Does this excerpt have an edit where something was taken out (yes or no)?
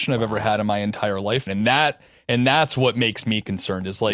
yes